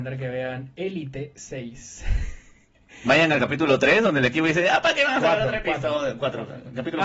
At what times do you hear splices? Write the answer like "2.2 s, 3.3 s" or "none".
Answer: none